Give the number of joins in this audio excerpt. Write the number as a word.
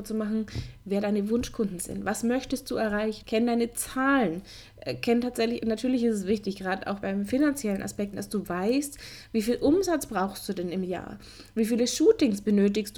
three